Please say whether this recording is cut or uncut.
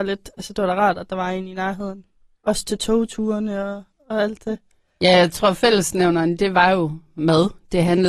uncut